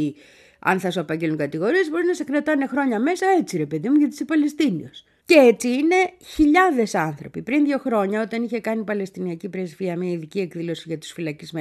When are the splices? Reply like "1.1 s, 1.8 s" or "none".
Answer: 5.2 s